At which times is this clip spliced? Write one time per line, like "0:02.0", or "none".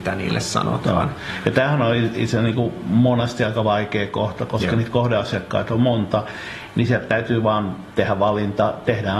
none